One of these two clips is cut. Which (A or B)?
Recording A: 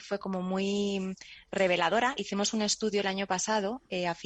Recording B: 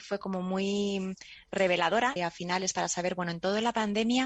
B